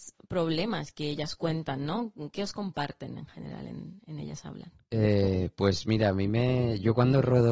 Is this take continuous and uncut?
yes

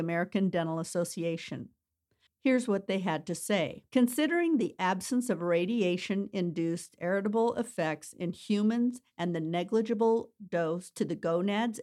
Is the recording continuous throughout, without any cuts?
no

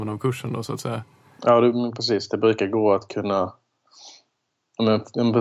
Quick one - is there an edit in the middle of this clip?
no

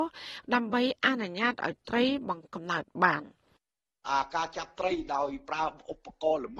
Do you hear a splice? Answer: yes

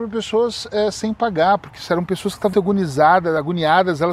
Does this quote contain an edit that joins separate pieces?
yes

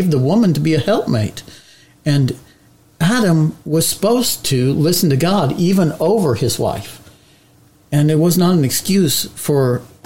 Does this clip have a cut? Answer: no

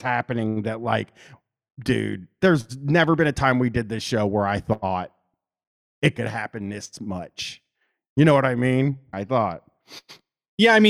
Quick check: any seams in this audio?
yes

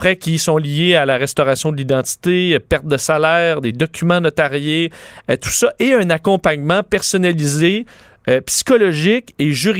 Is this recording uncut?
yes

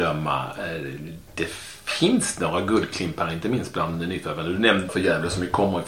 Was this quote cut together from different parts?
yes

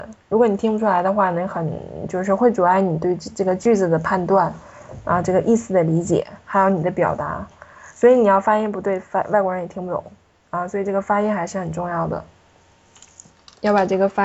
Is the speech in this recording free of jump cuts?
yes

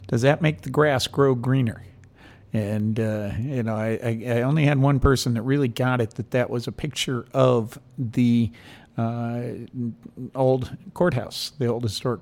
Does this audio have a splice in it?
no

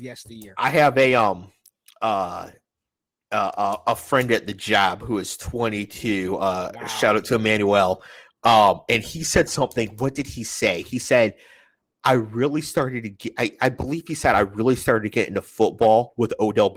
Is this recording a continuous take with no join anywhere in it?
yes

